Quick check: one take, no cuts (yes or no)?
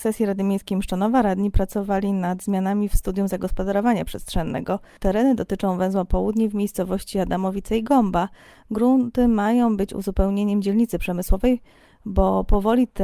yes